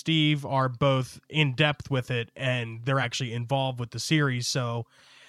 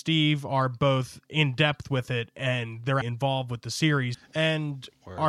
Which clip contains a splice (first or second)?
second